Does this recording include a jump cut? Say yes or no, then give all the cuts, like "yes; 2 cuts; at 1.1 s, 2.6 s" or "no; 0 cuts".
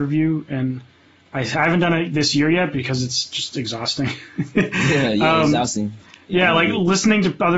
no; 0 cuts